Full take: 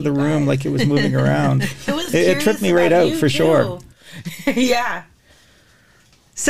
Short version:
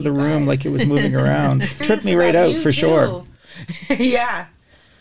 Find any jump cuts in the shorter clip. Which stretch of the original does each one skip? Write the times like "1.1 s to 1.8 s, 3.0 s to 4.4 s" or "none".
1.8 s to 2.4 s